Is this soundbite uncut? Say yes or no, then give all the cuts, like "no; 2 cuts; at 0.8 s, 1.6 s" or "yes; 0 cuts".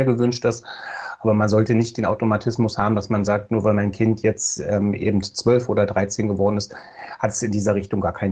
yes; 0 cuts